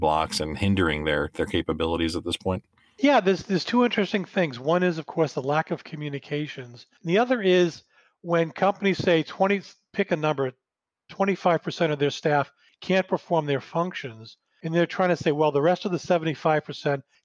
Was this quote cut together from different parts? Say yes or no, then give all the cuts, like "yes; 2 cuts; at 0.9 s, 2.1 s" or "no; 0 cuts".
no; 0 cuts